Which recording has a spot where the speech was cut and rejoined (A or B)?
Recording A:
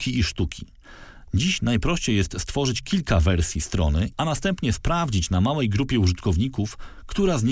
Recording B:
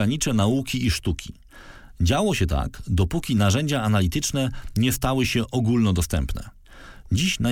A